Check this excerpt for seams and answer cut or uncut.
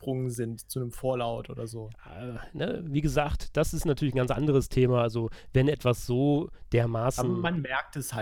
uncut